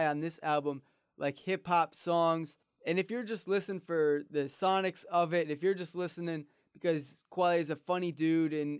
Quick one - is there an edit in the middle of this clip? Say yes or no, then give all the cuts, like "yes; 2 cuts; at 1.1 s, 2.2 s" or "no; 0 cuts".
no; 0 cuts